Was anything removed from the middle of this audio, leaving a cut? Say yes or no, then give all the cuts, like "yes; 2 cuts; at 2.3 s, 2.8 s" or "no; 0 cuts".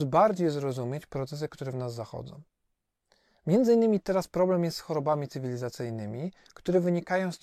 no; 0 cuts